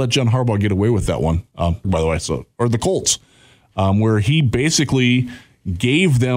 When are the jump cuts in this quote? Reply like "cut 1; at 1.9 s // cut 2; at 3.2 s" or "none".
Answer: cut 1; at 1.8 s